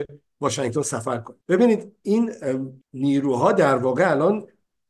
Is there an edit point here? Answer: yes; 2 cuts; at 1.4 s, 2.8 s

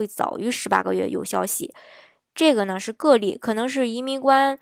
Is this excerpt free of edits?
yes; 0 cuts

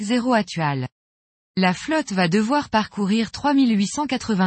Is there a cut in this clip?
yes; 1 cut; at 1.4 s

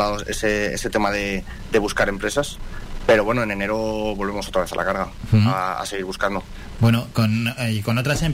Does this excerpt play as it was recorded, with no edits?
yes; 0 cuts

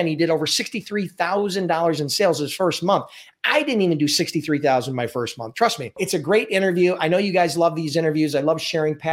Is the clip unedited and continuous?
yes; 0 cuts

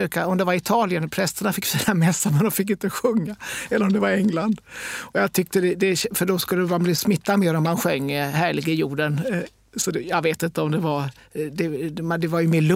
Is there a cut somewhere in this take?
no; 0 cuts

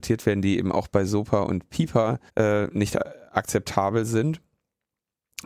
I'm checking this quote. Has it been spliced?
yes; 1 cut; at 2.3 s

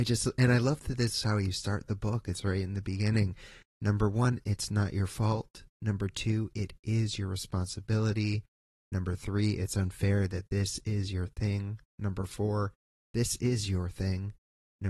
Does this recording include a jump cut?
no; 0 cuts

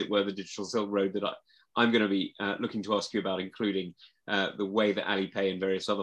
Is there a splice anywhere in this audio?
no; 0 cuts

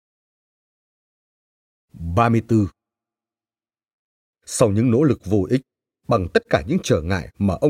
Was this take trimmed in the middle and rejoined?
yes; 1 cut; at 4.3 s

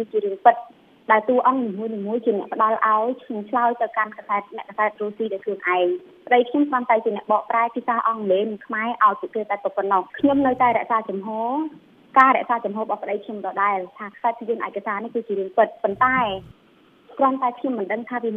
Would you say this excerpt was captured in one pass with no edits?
no; 1 cut; at 10.1 s

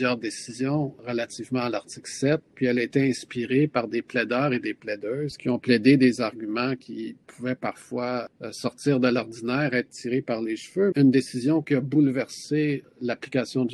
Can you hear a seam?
yes; 1 cut; at 10.9 s

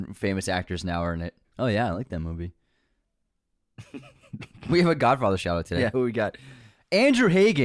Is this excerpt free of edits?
no; 1 cut; at 1.4 s

